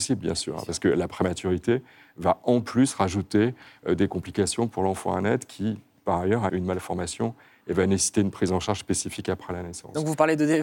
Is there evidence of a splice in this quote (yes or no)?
yes